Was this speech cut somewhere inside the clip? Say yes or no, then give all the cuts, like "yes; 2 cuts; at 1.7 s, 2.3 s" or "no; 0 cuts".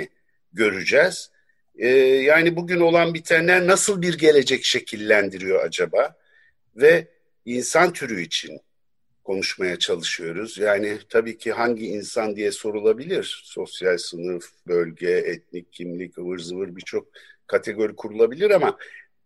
no; 0 cuts